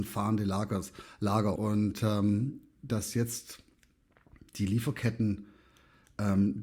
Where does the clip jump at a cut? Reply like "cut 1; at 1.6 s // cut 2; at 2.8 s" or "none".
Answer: cut 1; at 1.6 s // cut 2; at 2.9 s